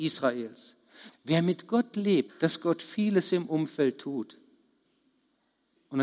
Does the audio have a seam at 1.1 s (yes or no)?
yes